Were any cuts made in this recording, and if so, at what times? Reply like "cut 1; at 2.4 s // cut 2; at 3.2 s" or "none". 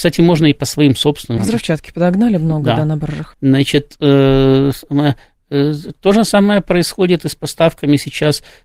cut 1; at 1.4 s // cut 2; at 3.3 s